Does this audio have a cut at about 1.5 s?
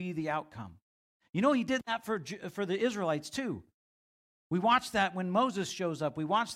no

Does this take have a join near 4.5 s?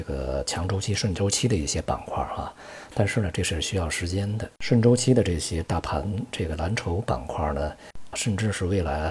yes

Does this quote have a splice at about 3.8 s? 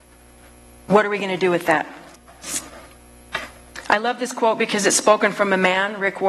no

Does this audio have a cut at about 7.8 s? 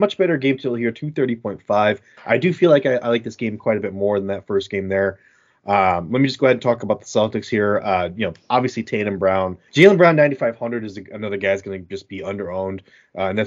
no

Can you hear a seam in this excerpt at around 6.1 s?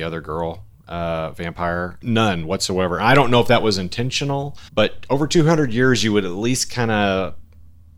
no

